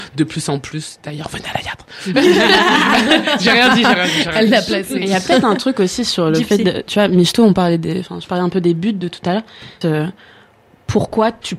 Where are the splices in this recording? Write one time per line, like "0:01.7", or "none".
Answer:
0:09.8